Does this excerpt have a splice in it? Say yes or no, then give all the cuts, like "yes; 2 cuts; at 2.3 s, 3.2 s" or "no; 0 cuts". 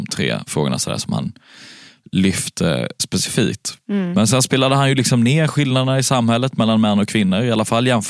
no; 0 cuts